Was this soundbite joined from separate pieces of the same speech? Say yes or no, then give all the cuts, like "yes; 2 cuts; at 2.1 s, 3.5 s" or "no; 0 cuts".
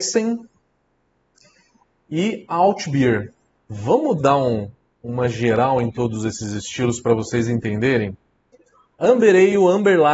yes; 2 cuts; at 3.6 s, 8.9 s